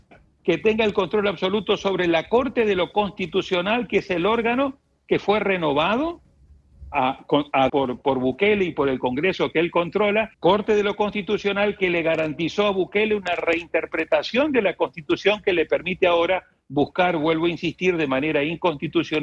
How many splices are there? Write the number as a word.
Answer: two